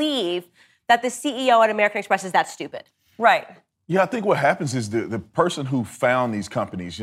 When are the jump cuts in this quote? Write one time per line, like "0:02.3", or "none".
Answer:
none